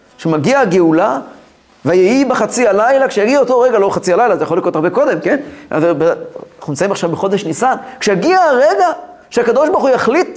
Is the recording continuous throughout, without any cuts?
yes; 0 cuts

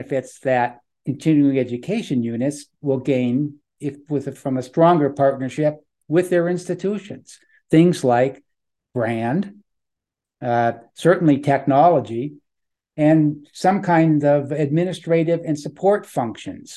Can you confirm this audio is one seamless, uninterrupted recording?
yes; 0 cuts

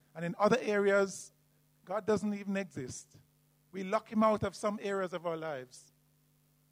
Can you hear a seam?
no; 0 cuts

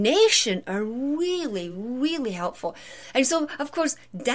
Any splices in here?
no; 0 cuts

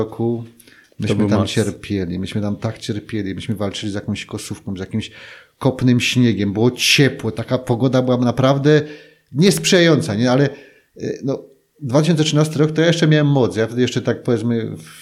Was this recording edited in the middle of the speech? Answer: no; 0 cuts

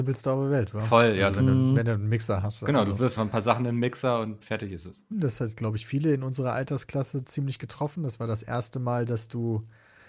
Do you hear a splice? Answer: yes; 2 cuts; at 3.2 s, 5.1 s

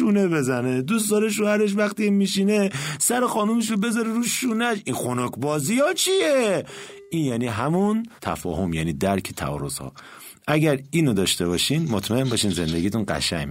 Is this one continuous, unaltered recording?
no; 1 cut; at 8.2 s

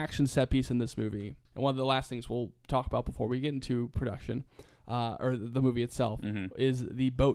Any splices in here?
yes; 1 cut; at 1.5 s

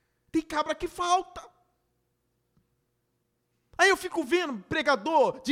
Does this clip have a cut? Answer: no; 0 cuts

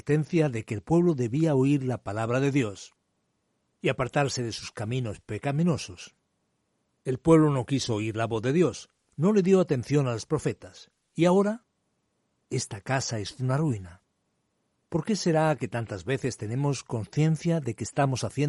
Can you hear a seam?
no; 0 cuts

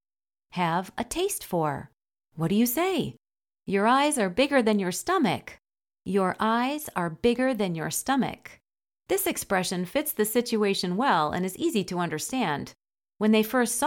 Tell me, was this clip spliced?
yes; 1 cut; at 2.2 s

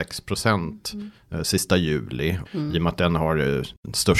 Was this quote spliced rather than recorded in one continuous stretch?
yes; 1 cut; at 2.5 s

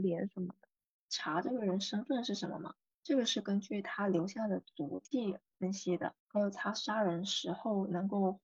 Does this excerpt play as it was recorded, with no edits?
no; 3 cuts; at 1.0 s, 2.9 s, 6.2 s

